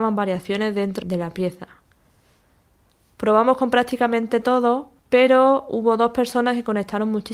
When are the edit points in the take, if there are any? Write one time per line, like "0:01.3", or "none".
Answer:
0:01.0
0:05.0